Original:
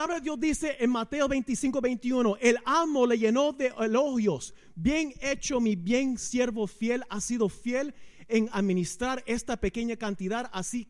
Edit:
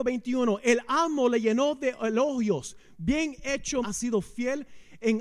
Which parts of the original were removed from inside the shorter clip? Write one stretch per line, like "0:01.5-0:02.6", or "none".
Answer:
0:05.6-0:07.1